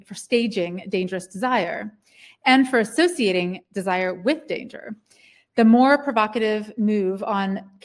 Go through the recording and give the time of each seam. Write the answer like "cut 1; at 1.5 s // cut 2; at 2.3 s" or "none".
none